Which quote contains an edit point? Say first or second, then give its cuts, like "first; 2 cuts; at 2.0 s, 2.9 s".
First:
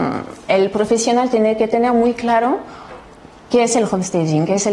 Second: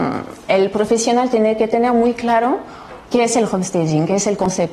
second; 1 cut; at 3.1 s